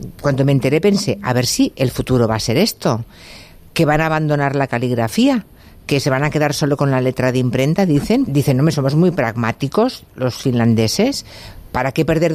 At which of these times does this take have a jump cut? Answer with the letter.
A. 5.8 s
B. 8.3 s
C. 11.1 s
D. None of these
B